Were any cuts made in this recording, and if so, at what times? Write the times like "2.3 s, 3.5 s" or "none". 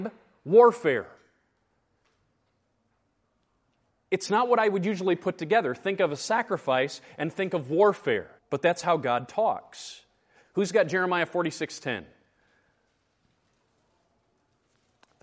8.4 s, 10.4 s